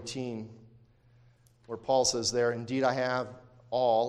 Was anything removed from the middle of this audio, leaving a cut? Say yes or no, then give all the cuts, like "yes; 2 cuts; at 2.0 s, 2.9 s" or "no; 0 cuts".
no; 0 cuts